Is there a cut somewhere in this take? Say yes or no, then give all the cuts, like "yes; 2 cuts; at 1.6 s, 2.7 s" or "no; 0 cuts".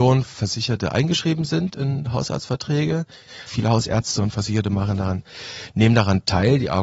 yes; 1 cut; at 3.5 s